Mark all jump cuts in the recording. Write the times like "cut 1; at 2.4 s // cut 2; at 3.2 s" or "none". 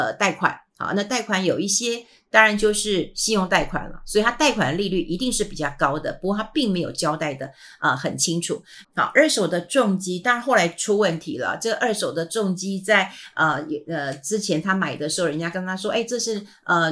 cut 1; at 8.8 s